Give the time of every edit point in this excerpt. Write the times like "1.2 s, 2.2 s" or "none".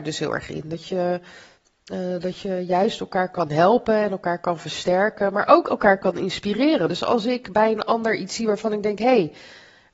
none